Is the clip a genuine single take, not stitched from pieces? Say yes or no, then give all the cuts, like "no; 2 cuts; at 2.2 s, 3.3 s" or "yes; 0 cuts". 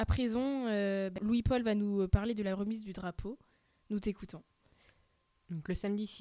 yes; 0 cuts